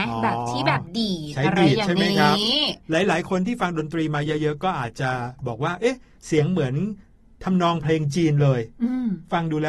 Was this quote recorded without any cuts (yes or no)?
yes